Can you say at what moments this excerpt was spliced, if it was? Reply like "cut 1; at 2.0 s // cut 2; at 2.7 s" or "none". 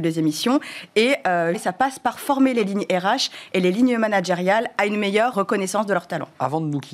cut 1; at 1.5 s // cut 2; at 5.3 s